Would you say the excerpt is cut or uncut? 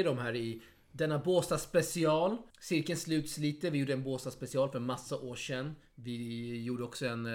cut